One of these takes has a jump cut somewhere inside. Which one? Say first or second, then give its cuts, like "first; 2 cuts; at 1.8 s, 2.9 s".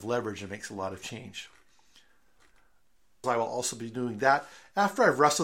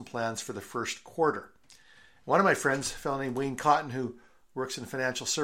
first; 1 cut; at 3.2 s